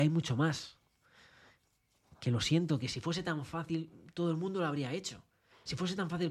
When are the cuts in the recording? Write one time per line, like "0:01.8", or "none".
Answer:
none